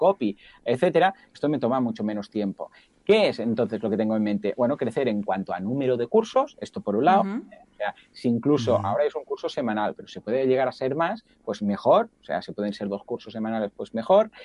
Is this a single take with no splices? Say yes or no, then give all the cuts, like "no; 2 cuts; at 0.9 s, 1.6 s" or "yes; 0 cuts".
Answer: yes; 0 cuts